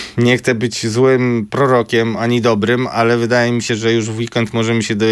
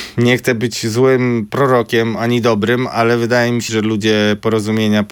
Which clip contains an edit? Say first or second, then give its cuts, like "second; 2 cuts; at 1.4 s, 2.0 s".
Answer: second; 1 cut; at 3.7 s